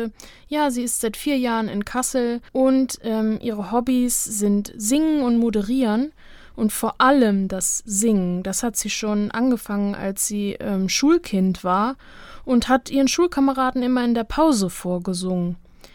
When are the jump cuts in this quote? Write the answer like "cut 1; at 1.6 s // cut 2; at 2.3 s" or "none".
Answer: cut 1; at 2.5 s